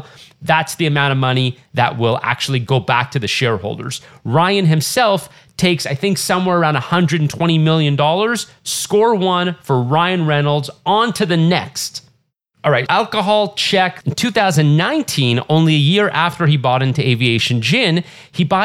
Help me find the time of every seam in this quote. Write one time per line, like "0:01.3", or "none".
0:12.9
0:14.0